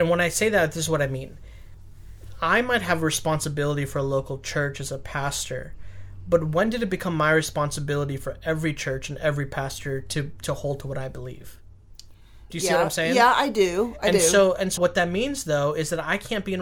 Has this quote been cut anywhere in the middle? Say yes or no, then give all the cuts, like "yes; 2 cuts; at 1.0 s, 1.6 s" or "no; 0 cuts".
yes; 2 cuts; at 12.5 s, 14.8 s